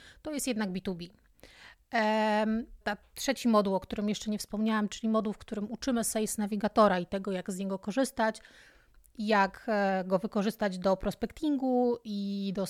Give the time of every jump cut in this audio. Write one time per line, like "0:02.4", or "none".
0:02.8

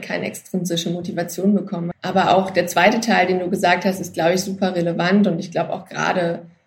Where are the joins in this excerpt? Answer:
0:01.9

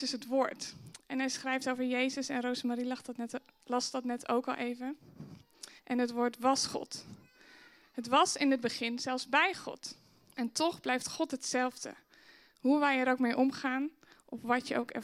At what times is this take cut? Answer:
0:05.8
0:10.3

